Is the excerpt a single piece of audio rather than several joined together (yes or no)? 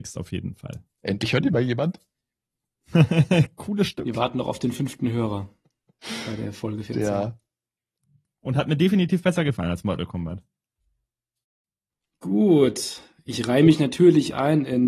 yes